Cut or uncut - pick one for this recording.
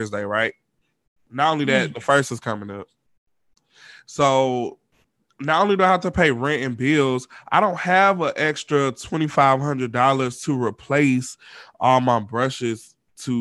uncut